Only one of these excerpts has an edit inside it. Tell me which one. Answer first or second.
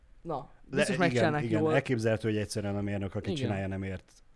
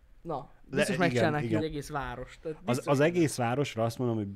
second